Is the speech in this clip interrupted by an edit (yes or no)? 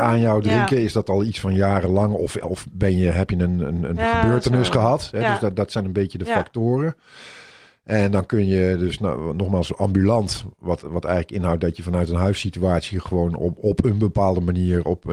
no